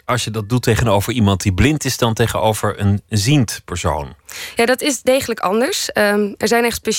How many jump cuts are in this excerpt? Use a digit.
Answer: 0